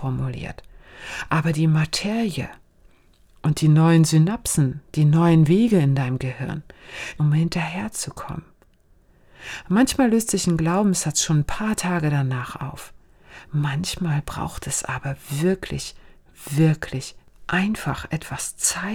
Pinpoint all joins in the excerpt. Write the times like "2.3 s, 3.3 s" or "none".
7.2 s

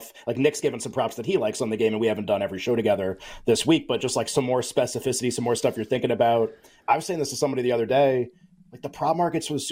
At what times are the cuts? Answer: none

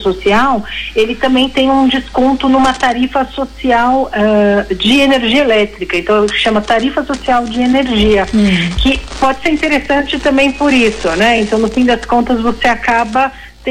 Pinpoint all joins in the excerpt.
none

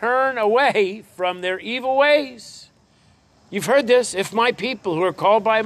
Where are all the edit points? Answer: none

